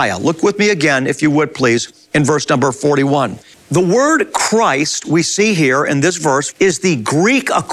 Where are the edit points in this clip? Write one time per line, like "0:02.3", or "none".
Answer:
0:03.5
0:06.5